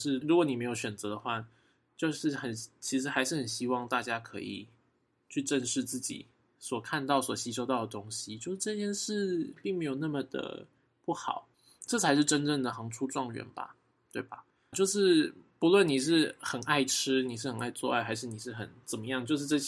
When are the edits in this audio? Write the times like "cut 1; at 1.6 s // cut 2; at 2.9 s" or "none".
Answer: cut 1; at 12.7 s // cut 2; at 14.7 s